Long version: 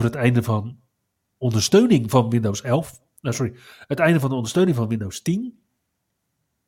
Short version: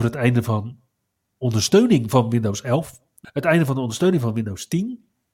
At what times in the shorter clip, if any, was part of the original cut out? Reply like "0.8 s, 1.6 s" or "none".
3.2 s